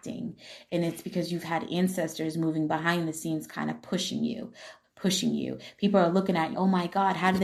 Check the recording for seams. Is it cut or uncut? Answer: cut